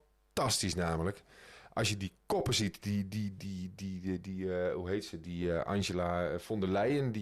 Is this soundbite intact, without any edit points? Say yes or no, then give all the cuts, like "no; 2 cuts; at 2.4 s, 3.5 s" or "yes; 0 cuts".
yes; 0 cuts